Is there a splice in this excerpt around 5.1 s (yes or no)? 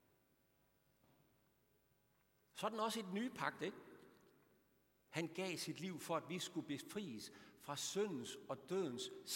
yes